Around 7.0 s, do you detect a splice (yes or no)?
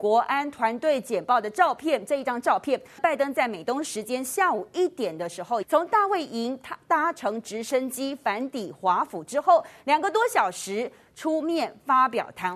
no